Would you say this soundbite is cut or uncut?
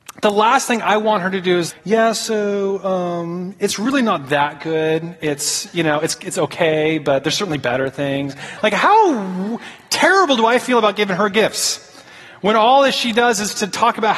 cut